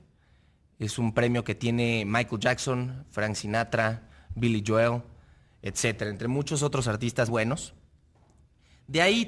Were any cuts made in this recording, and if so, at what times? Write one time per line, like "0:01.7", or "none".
0:07.3